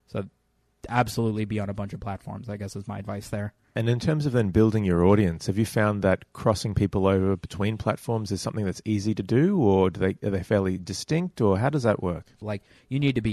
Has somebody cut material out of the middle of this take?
yes; 1 cut; at 12.4 s

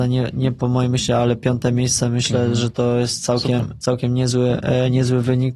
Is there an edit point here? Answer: no; 0 cuts

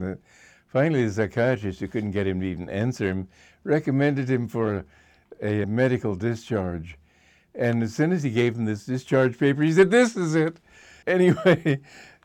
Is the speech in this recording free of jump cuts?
no; 2 cuts; at 5.6 s, 11.0 s

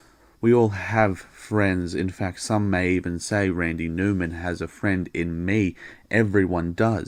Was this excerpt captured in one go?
yes; 0 cuts

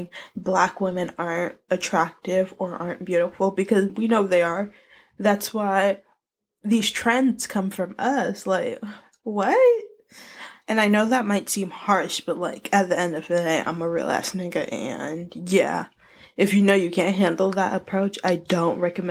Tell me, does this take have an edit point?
yes; 2 cuts; at 3.9 s, 10.6 s

